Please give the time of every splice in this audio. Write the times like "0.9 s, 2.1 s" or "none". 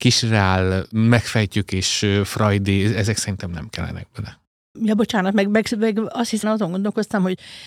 4.7 s, 6.4 s